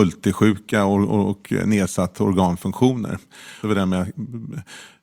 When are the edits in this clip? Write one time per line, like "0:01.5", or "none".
0:03.6